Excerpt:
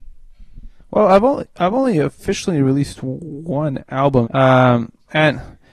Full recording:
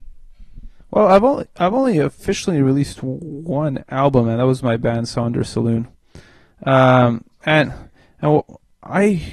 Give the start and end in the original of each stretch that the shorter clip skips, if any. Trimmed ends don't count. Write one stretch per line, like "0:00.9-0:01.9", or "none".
0:04.2-0:06.6